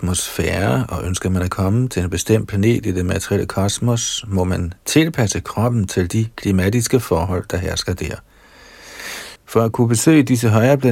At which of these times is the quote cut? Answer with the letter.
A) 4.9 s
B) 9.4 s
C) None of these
B